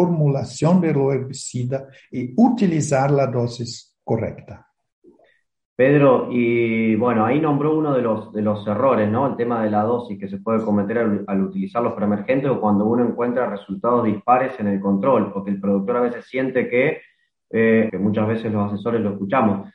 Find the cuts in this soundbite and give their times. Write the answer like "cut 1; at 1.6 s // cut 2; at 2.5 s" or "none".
cut 1; at 17.9 s